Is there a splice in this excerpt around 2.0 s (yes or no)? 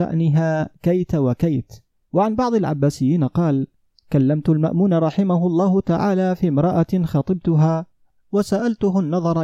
yes